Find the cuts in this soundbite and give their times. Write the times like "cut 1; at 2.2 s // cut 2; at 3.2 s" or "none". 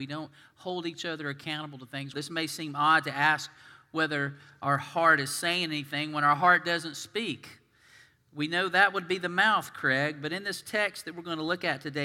cut 1; at 2.1 s